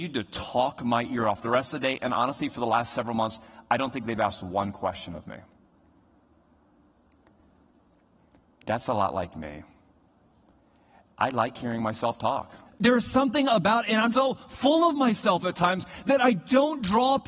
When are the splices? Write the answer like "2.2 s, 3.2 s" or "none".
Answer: 12.7 s, 14.1 s